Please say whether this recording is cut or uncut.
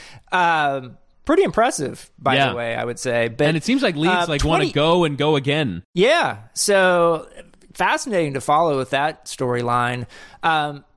uncut